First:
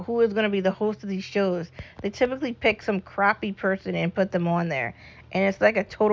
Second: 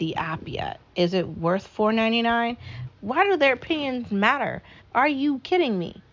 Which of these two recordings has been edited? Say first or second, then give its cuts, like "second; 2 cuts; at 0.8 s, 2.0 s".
second; 2 cuts; at 2.8 s, 4.8 s